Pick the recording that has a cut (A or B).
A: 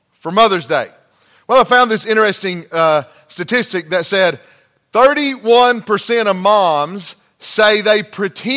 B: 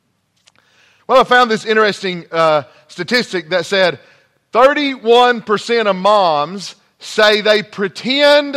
B